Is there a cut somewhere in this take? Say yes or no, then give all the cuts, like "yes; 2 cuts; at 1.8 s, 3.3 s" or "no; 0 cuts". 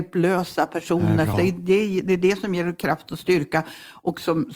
yes; 1 cut; at 1.3 s